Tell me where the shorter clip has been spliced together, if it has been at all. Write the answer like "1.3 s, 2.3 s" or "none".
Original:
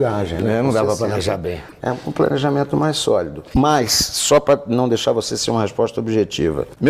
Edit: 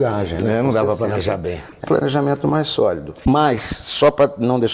1.8 s